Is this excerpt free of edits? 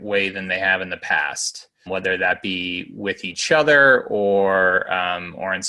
no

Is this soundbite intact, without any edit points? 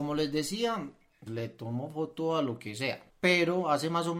no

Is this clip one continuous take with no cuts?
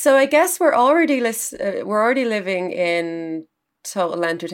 yes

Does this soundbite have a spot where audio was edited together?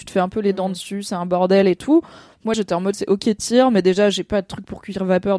yes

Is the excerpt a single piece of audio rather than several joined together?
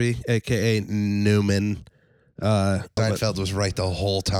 no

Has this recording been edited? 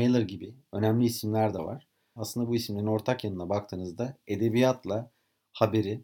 yes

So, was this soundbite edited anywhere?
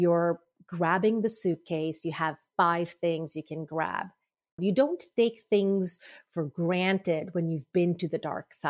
yes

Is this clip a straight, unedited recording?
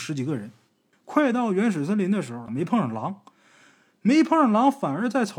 no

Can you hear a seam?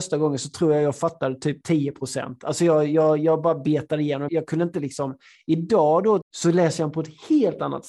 yes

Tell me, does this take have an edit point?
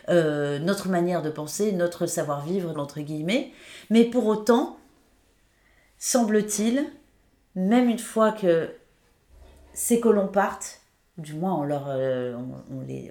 yes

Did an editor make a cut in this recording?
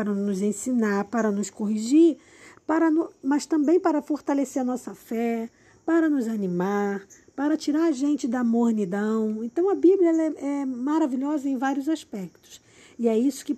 no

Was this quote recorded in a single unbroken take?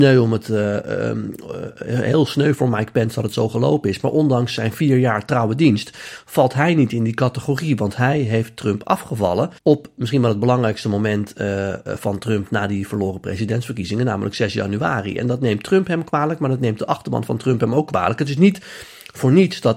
no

